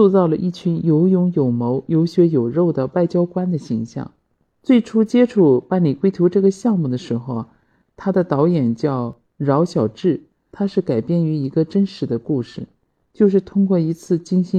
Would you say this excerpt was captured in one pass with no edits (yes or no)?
no